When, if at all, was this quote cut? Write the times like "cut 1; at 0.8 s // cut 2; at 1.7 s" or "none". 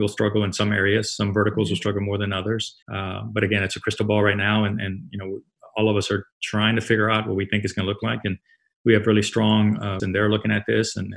cut 1; at 2.8 s // cut 2; at 10.0 s